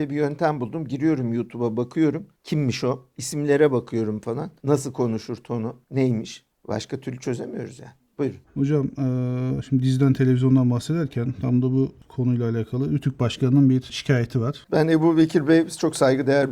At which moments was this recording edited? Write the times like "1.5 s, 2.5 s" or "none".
8.4 s, 14.6 s